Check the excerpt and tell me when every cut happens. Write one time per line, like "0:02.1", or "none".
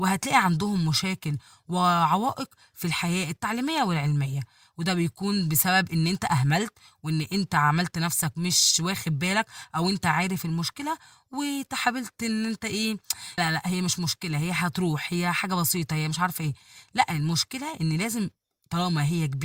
0:13.4